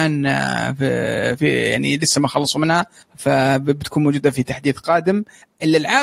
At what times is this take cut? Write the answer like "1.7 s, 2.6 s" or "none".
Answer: 1.4 s

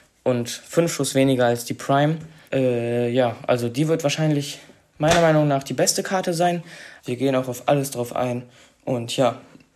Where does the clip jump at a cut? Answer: 2.5 s, 7.0 s

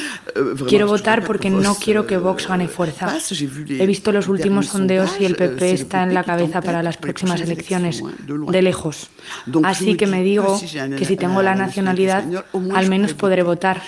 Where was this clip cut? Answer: none

